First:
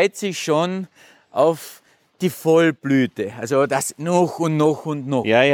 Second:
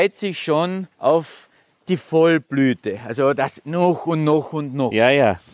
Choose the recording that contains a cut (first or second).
second